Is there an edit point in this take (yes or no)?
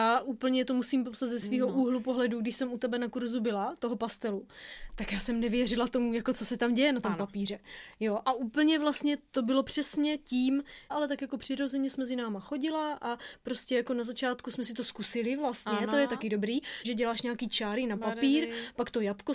yes